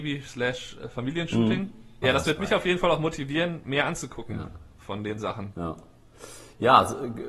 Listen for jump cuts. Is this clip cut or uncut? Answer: cut